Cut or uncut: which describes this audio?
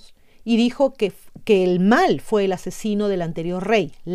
uncut